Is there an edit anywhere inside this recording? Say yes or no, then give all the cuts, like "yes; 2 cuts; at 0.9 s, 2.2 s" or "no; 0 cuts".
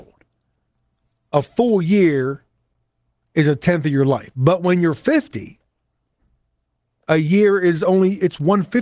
yes; 1 cut; at 4.3 s